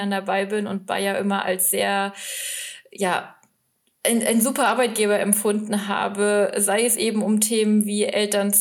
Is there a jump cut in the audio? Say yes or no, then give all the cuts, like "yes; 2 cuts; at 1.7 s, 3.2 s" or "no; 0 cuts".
no; 0 cuts